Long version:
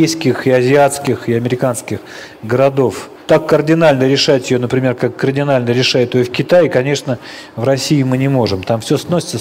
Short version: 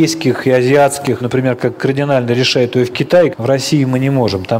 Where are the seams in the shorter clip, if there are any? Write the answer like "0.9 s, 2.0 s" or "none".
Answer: 1.2 s, 3.3 s

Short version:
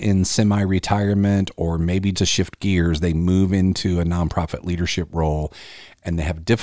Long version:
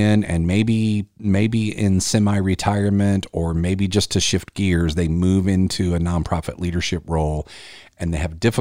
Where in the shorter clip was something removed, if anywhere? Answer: 2.1 s

